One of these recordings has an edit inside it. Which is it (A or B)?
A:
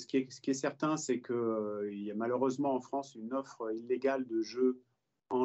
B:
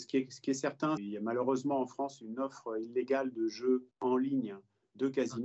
B